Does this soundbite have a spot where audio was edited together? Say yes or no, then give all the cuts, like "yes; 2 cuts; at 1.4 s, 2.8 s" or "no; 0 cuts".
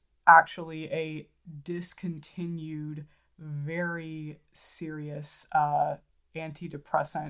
no; 0 cuts